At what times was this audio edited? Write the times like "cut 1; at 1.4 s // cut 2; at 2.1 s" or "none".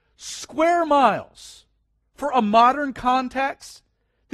cut 1; at 2.0 s